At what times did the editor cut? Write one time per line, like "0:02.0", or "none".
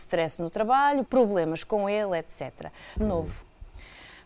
0:01.1
0:03.0